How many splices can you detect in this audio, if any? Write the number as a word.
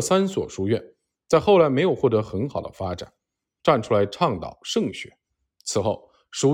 one